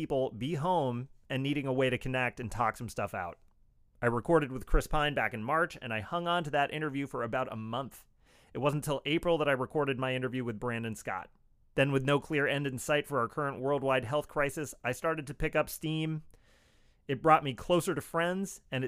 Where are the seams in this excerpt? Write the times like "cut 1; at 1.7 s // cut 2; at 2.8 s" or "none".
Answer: none